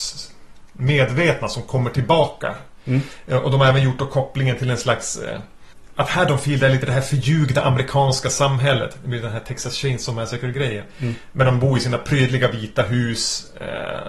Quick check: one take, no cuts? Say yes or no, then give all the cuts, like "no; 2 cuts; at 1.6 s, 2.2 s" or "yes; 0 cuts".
yes; 0 cuts